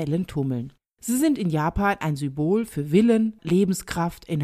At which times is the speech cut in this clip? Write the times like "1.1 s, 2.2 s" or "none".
0.9 s, 3.4 s

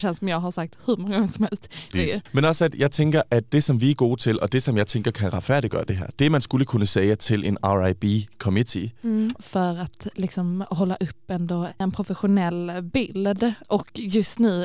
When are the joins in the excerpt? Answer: 1.9 s, 9.4 s, 11.7 s

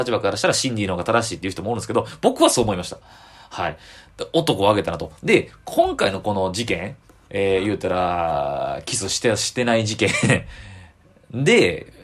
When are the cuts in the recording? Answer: none

